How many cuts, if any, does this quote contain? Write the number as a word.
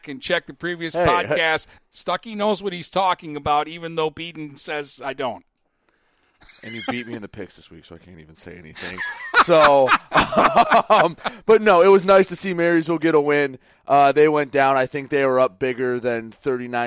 one